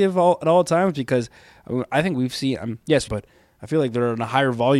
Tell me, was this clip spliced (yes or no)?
yes